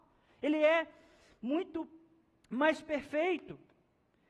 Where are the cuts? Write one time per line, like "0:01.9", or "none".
none